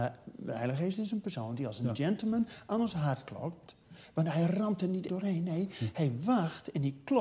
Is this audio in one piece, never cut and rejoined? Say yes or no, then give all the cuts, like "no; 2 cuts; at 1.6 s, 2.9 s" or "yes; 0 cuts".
no; 1 cut; at 5.1 s